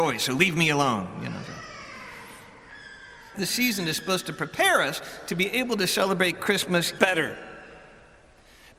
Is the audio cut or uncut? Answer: cut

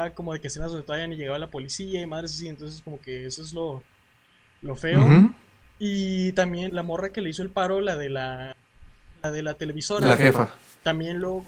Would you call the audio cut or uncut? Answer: cut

